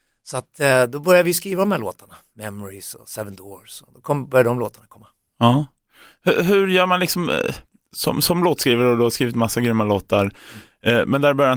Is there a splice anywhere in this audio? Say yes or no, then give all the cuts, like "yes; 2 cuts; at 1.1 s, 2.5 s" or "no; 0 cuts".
no; 0 cuts